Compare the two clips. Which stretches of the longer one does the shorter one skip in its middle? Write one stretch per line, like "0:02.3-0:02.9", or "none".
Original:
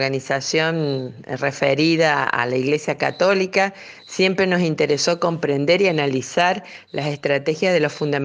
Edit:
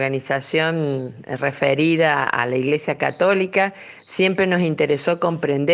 none